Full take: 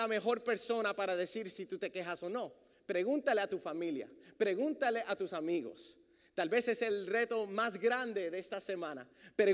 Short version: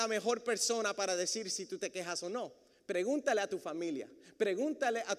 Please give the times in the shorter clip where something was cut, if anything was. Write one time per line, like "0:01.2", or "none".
none